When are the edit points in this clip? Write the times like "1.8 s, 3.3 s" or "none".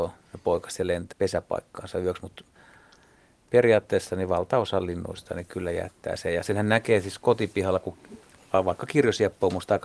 1.1 s